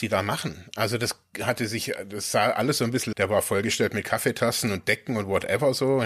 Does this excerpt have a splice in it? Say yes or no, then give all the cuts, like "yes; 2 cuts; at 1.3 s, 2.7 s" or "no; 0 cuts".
yes; 1 cut; at 3.1 s